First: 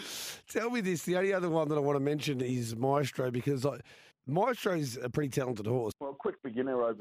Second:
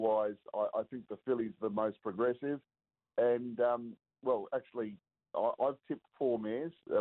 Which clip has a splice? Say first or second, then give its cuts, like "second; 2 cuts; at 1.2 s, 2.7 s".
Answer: first; 2 cuts; at 4.1 s, 5.9 s